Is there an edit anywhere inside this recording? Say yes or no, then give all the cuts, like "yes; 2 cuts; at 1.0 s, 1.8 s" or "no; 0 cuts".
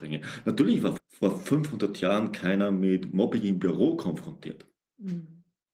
yes; 1 cut; at 1.0 s